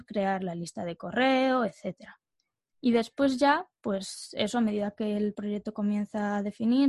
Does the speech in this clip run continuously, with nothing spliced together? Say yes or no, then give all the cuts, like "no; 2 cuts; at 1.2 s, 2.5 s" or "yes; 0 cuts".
no; 1 cut; at 2.6 s